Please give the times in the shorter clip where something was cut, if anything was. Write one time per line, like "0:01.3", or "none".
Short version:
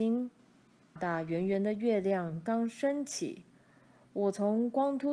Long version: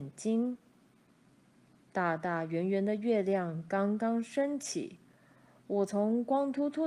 0:01.0
0:02.5